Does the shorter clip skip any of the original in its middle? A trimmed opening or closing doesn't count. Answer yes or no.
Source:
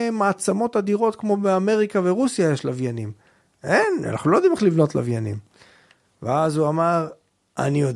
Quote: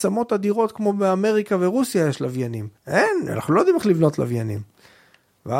yes